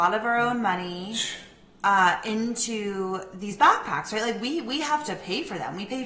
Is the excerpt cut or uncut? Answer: uncut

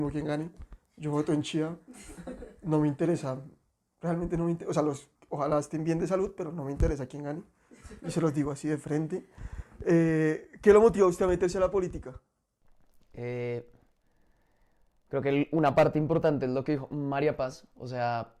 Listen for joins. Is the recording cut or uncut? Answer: cut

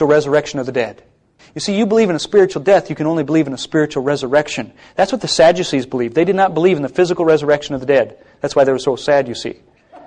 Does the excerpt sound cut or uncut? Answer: uncut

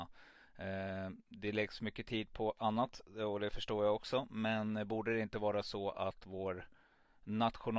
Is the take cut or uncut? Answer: uncut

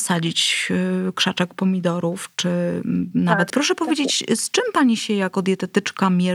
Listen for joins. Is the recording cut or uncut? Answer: cut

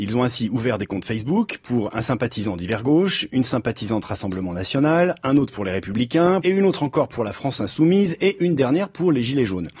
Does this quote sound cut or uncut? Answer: cut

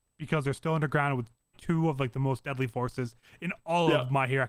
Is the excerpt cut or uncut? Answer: cut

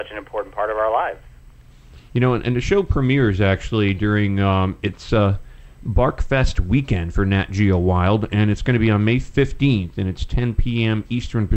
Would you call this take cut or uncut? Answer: uncut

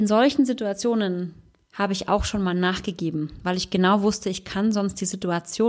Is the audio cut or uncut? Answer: uncut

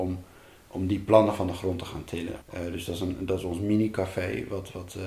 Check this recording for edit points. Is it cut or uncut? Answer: cut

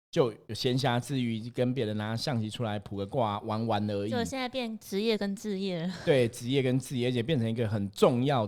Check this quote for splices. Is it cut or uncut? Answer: uncut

